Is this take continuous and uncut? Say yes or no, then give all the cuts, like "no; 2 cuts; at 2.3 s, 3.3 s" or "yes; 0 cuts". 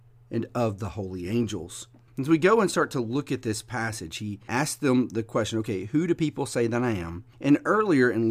no; 1 cut; at 2.1 s